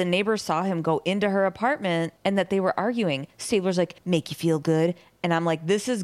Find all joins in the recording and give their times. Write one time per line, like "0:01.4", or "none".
0:04.0